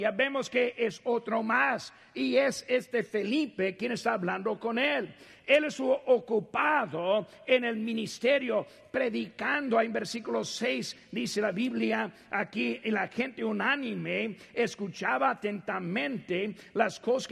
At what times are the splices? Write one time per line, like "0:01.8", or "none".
none